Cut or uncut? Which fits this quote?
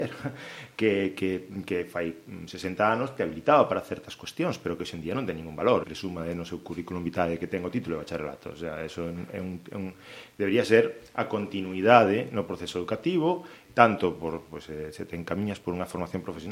cut